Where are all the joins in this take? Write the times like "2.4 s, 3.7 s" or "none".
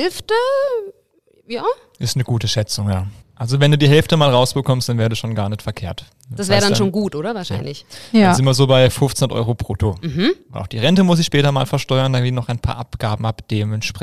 3.2 s